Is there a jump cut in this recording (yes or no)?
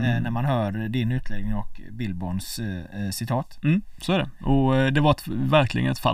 no